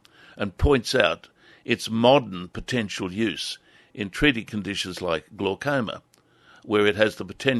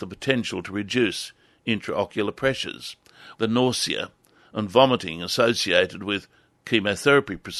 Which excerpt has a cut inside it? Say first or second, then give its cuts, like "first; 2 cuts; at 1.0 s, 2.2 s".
second; 1 cut; at 3.3 s